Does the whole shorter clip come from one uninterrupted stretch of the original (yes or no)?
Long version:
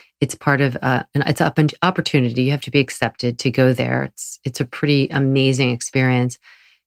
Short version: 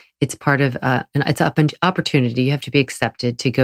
yes